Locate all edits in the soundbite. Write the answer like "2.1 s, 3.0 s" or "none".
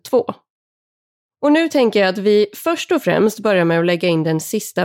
1.2 s

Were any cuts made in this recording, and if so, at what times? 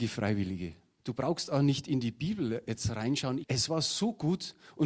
1.0 s, 3.4 s

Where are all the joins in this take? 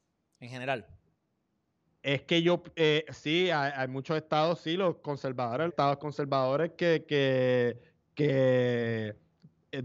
5.7 s

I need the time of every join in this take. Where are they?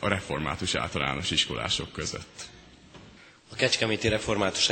none

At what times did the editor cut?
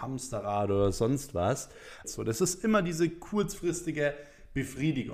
2.0 s

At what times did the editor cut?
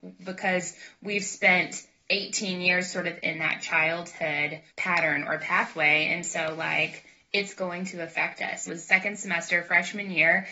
4.7 s, 8.7 s

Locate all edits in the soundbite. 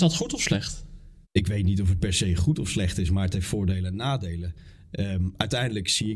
1.2 s

